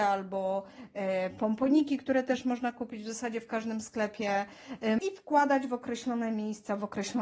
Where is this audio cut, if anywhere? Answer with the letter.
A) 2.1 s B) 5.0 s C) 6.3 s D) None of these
B